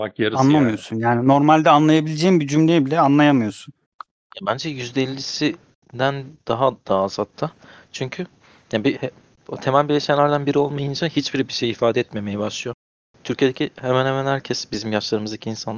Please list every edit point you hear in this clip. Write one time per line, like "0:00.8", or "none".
0:08.9